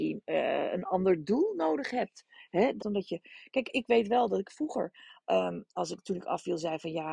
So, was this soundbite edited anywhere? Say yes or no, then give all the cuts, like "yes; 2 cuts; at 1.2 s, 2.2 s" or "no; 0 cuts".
yes; 1 cut; at 2.8 s